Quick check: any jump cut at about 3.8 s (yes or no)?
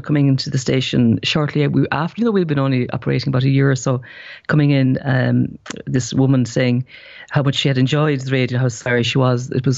no